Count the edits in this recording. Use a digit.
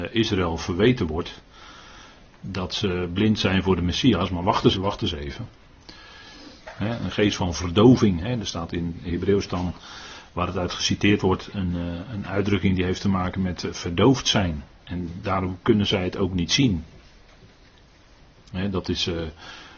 2